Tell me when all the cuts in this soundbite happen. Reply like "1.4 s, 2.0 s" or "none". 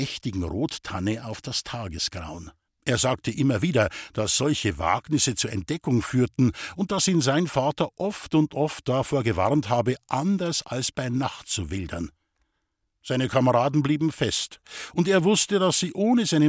2.7 s